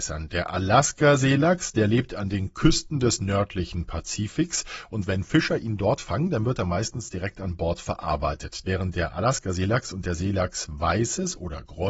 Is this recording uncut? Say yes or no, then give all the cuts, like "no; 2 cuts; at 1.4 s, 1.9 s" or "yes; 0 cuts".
no; 1 cut; at 8.6 s